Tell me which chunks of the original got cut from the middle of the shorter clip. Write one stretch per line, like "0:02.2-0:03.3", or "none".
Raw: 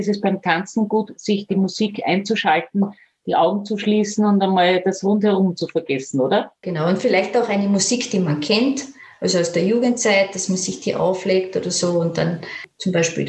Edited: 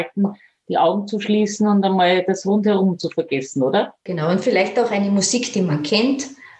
none

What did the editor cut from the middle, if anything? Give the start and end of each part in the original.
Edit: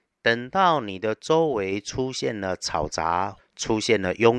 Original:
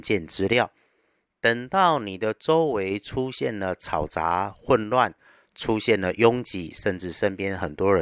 0:04.6-0:05.4

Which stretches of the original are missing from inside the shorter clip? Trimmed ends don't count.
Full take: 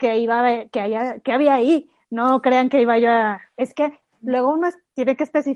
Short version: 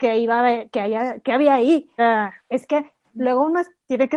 0:02.0-0:03.1

